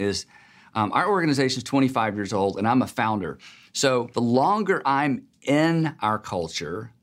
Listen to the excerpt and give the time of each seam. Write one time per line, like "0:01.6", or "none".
none